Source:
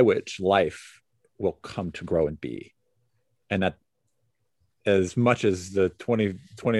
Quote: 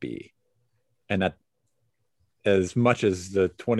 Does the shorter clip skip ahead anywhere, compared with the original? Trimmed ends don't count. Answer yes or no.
no